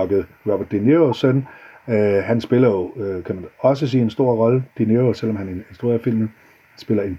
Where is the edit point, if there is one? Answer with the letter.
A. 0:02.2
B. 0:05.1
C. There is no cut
C